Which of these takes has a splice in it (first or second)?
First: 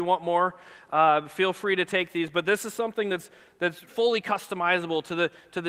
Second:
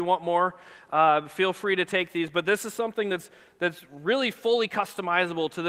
first